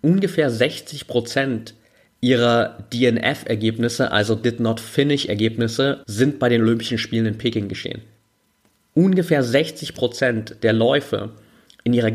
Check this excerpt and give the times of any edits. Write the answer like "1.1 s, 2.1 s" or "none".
6.0 s